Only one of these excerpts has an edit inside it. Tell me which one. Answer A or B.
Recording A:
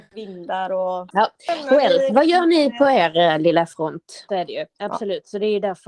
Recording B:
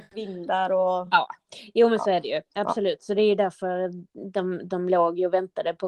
A